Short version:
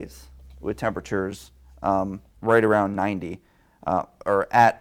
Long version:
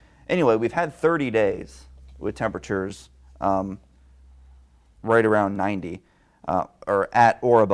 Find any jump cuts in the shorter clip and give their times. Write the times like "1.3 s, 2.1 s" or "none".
2.3 s

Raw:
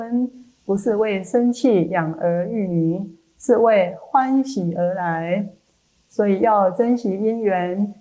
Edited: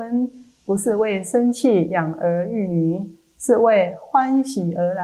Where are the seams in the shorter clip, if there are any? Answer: none

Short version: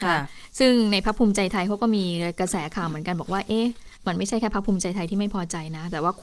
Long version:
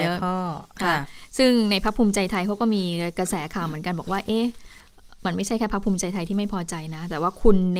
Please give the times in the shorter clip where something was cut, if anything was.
4.0 s

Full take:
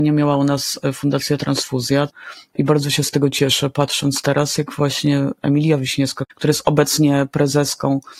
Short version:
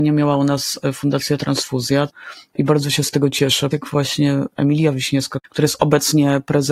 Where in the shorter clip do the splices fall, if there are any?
3.7 s

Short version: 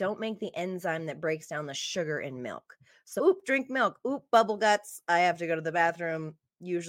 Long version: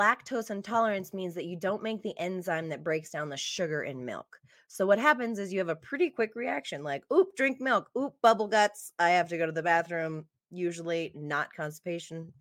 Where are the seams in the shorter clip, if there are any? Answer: 3.2 s

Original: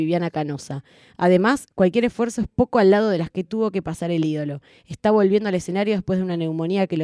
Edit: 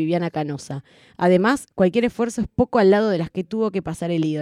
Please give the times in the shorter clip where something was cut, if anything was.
none

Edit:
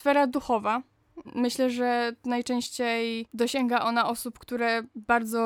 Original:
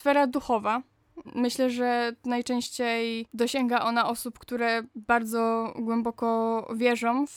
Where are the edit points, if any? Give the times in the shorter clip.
none

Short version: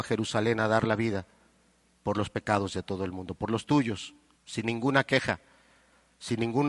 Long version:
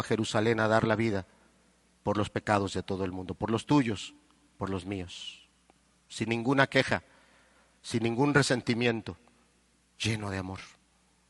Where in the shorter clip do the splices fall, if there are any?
4.4 s

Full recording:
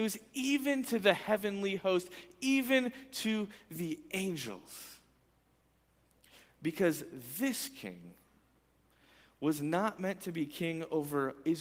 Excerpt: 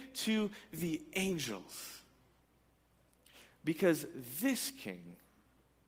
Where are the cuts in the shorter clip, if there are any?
none

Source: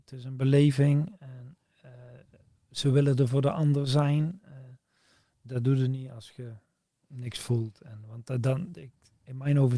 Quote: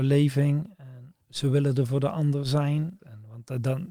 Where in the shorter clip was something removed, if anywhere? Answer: 1.2 s, 3.0 s

